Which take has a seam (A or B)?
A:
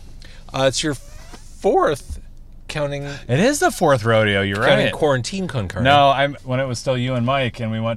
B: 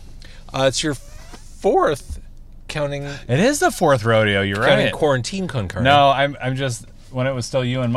A